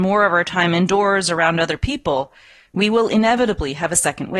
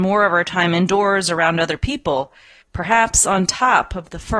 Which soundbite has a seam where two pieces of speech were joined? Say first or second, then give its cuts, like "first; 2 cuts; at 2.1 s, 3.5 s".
second; 1 cut; at 2.6 s